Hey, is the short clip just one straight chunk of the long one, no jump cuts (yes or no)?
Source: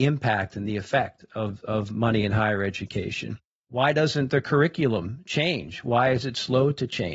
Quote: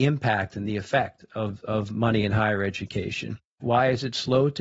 no